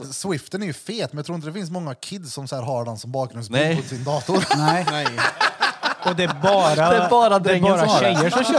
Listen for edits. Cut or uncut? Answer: uncut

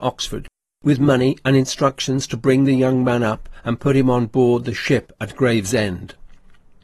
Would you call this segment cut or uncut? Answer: uncut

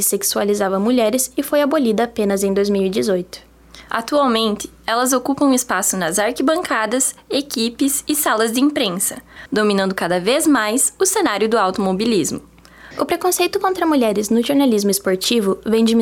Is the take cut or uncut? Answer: cut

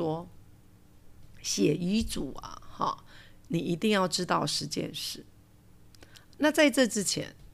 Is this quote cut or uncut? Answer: uncut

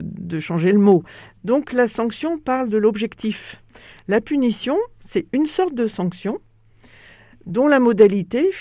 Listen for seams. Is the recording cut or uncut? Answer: cut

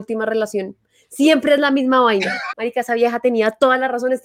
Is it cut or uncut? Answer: cut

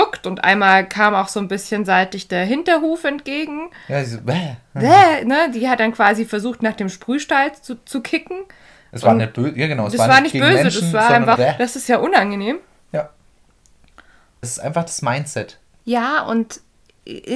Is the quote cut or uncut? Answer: cut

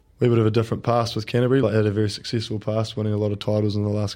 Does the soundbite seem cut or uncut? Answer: uncut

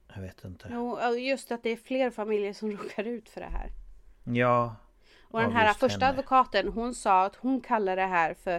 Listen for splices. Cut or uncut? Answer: cut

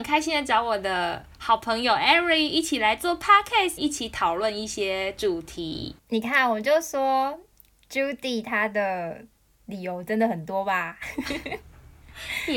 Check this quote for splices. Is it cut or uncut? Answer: cut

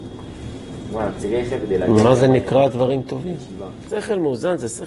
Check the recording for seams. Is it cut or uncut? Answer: cut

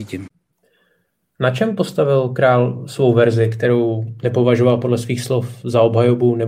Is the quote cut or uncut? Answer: uncut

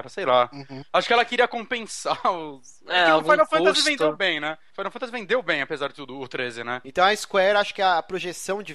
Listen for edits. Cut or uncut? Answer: cut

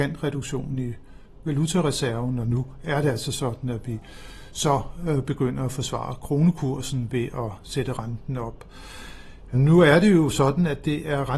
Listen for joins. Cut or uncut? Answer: uncut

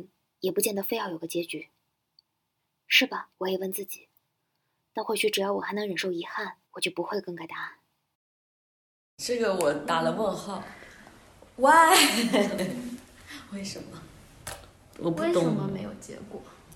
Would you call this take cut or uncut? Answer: cut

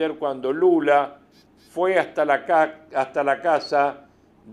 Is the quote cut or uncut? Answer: uncut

